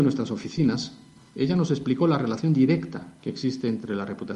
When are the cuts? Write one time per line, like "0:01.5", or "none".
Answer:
none